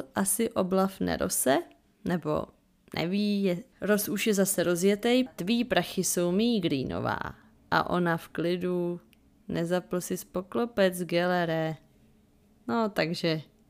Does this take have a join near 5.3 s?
yes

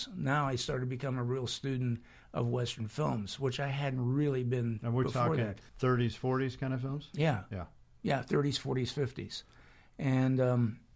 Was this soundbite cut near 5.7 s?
yes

